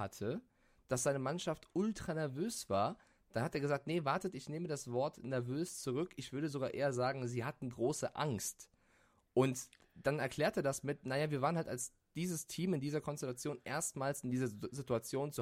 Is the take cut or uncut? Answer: uncut